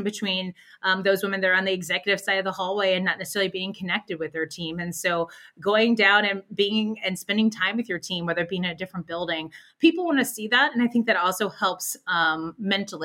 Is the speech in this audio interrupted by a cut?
no; 0 cuts

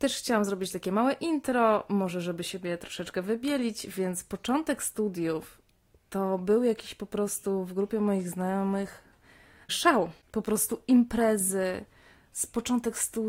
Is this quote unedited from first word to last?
yes; 0 cuts

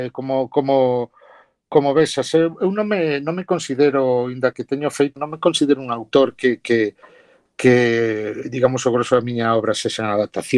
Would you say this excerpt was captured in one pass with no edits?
no; 1 cut; at 5.2 s

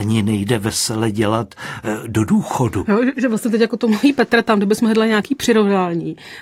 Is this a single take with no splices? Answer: yes; 0 cuts

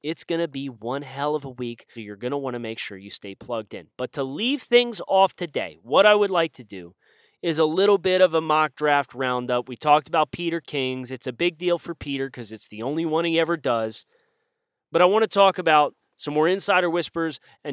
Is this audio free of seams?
no; 1 cut; at 2.0 s

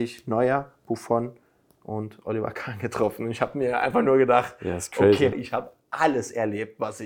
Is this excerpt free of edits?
no; 1 cut; at 5.3 s

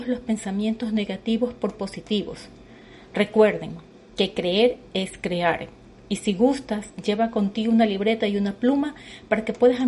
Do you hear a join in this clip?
no; 0 cuts

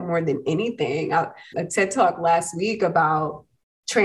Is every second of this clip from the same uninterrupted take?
no; 1 cut; at 1.5 s

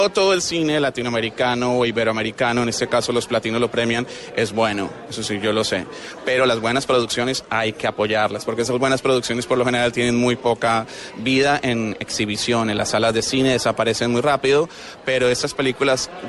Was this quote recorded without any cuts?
yes; 0 cuts

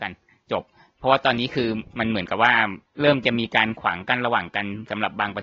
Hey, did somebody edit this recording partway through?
no; 0 cuts

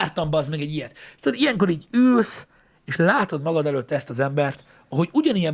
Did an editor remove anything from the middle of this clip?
no; 0 cuts

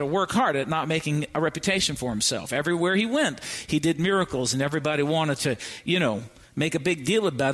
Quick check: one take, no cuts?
yes; 0 cuts

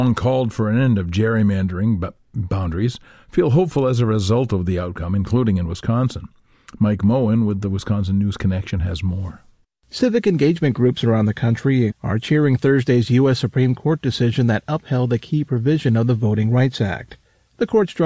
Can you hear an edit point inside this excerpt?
yes; 1 cut; at 11.9 s

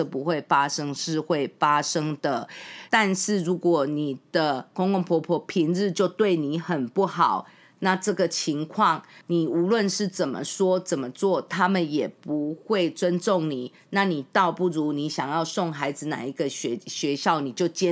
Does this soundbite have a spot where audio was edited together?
yes; 1 cut; at 2.9 s

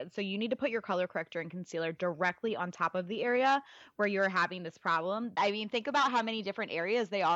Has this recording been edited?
yes; 1 cut; at 5.4 s

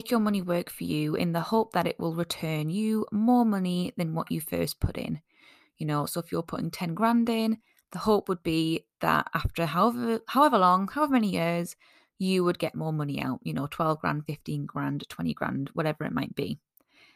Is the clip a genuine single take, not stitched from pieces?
yes; 0 cuts

